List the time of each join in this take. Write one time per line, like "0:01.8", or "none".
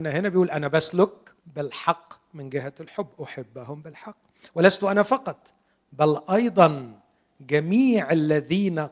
0:01.4